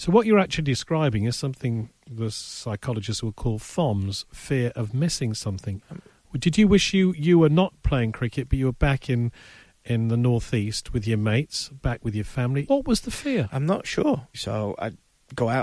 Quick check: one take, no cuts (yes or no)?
no